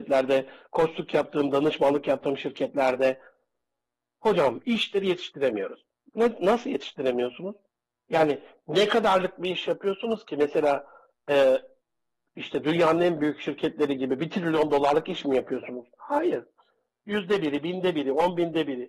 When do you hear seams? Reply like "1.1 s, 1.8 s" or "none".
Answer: none